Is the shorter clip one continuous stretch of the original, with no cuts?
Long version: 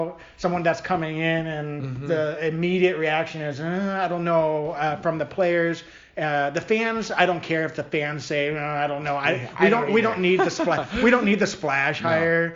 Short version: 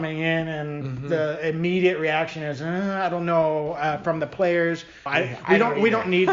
no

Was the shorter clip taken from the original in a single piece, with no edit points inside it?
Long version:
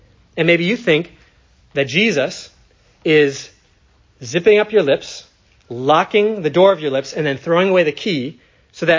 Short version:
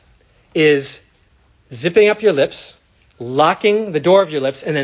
yes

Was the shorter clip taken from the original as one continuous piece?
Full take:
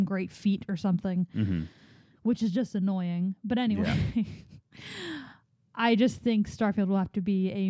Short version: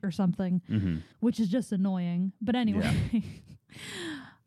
no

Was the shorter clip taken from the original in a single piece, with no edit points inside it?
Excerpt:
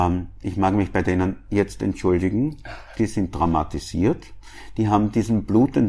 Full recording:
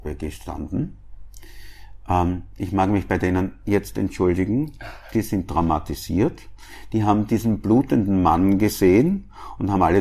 yes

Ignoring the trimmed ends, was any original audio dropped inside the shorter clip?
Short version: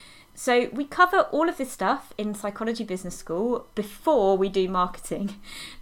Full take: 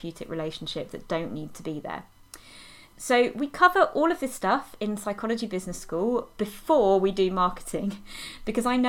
no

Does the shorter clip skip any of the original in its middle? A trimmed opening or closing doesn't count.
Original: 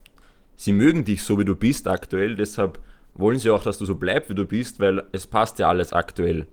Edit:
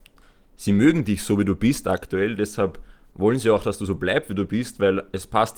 no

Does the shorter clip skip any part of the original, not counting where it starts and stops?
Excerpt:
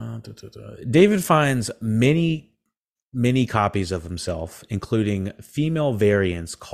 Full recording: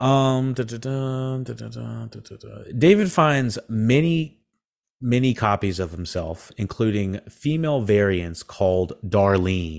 no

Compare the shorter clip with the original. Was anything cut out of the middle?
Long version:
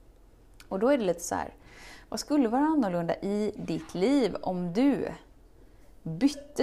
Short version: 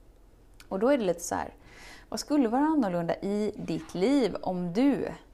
no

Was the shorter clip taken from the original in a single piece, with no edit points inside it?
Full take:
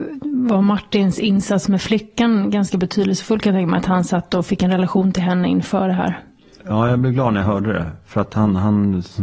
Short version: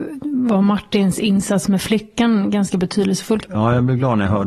no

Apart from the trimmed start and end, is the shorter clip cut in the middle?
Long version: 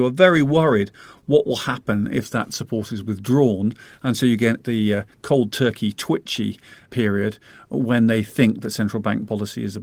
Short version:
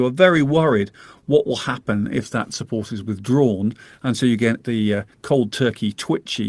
no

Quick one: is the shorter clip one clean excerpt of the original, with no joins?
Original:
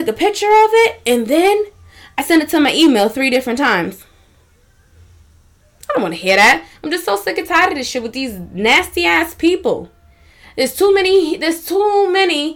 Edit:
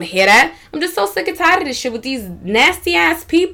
yes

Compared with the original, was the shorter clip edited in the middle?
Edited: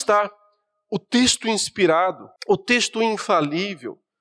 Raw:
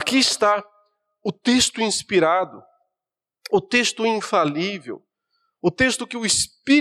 yes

